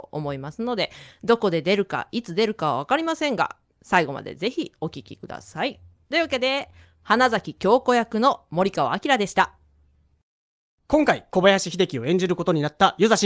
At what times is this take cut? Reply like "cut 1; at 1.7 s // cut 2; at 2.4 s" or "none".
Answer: none